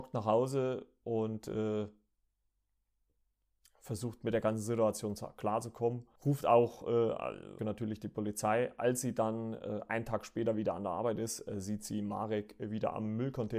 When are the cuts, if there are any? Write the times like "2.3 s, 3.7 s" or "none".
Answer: 6.2 s, 7.6 s